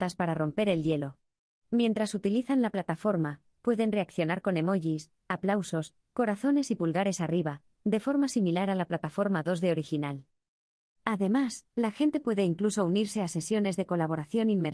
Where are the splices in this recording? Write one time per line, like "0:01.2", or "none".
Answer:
none